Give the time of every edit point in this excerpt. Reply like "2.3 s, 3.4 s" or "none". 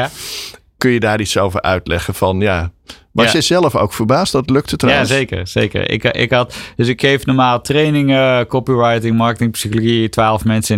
none